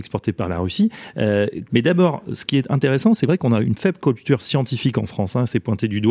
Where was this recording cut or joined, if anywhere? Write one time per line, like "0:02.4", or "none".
0:01.7